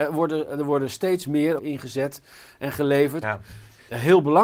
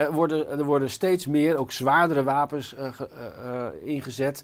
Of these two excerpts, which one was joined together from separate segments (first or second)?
first